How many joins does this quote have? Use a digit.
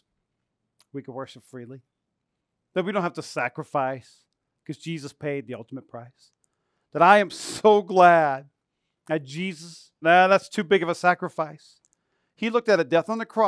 1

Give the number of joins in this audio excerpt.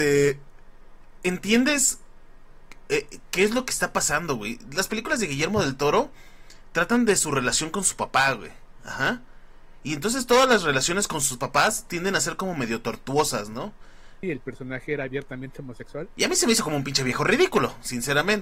2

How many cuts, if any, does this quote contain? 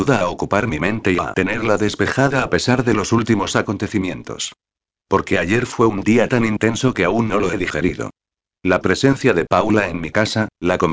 0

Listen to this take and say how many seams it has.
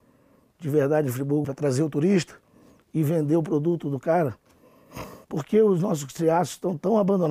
2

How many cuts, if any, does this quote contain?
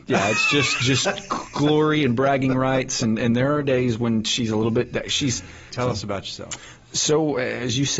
1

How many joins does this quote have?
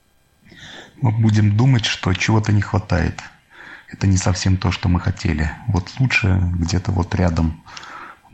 0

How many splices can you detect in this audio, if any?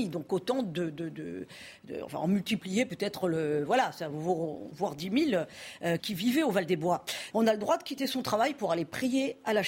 3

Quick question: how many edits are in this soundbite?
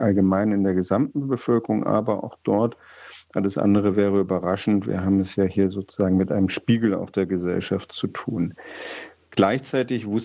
0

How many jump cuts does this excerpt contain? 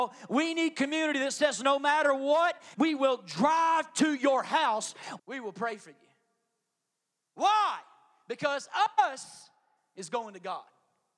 2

